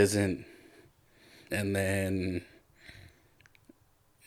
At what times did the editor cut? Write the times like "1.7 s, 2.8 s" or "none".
1.5 s